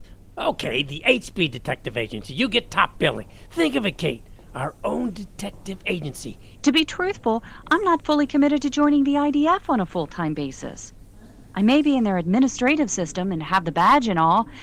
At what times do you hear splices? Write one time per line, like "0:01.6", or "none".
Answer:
0:06.6